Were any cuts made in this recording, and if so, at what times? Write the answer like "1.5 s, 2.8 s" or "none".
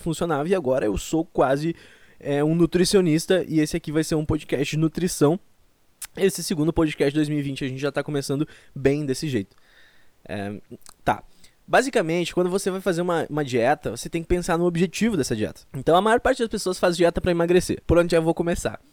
15.7 s, 17.8 s

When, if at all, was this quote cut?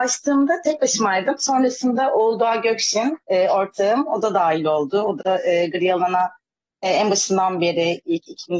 none

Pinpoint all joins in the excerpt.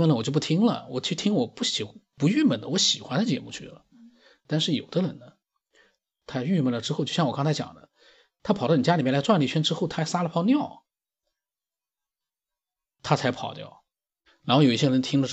14.3 s

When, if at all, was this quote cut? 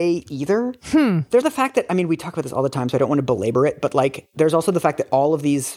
1.4 s

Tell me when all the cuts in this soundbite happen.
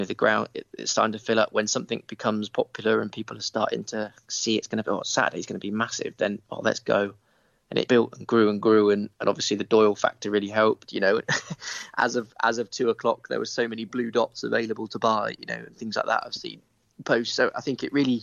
7.9 s, 10.9 s

